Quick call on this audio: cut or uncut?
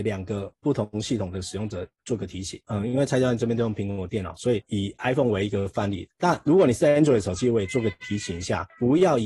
cut